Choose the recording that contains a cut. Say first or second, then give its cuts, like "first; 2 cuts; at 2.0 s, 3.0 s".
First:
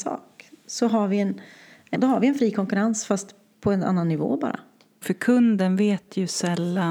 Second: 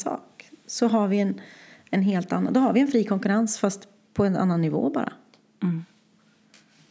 first; 2 cuts; at 1.9 s, 5.0 s